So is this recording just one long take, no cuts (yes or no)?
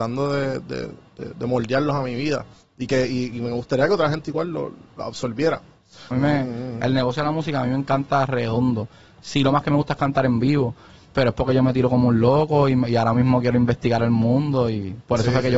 no